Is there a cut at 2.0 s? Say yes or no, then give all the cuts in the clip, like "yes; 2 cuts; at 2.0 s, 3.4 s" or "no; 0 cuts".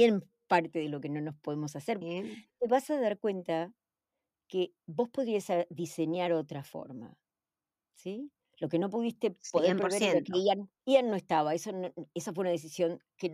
yes; 1 cut; at 2.0 s